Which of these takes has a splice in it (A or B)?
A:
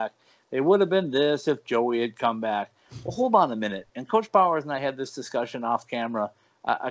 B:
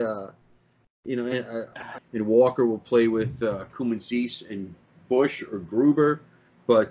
B